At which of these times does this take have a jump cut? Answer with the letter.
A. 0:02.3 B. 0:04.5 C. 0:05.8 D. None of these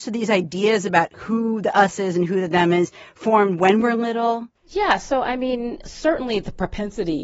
B